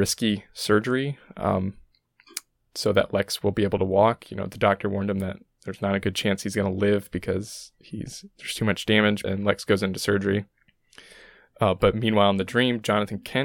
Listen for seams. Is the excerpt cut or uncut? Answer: cut